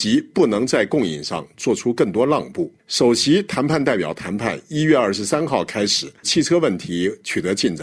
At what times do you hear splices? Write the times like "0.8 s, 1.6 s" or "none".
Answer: 6.2 s